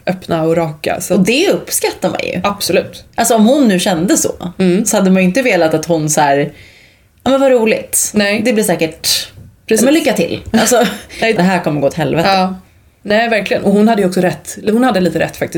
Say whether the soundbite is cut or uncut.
cut